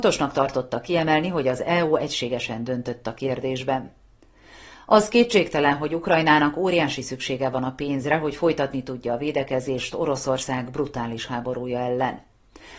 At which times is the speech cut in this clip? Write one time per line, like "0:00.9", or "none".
none